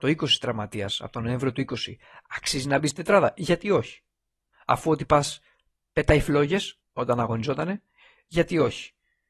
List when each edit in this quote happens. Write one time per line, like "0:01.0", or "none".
0:04.5
0:06.8